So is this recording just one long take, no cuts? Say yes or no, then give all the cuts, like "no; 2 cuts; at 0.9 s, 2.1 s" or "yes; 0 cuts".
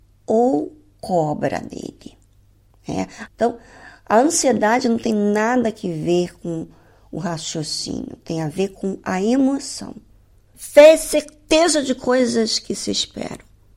no; 2 cuts; at 3.3 s, 10.5 s